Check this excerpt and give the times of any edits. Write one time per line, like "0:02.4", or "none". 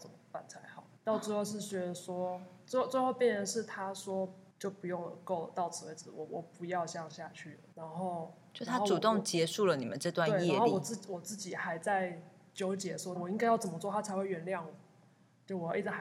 0:13.2